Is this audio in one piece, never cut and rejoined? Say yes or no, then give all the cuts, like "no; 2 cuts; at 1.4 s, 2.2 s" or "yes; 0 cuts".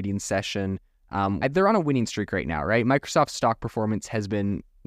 no; 1 cut; at 1.4 s